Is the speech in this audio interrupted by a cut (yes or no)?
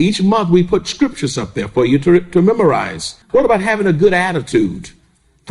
yes